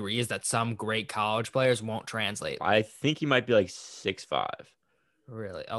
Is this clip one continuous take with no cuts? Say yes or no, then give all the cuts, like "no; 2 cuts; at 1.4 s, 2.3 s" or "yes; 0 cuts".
no; 1 cut; at 2.6 s